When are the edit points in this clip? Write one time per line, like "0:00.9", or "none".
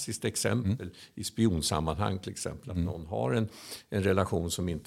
none